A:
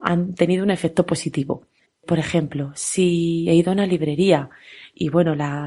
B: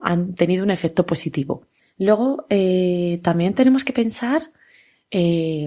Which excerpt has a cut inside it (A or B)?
A